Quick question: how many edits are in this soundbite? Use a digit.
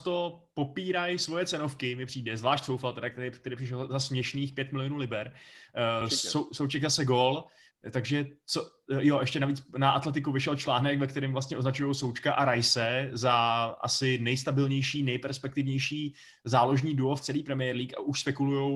2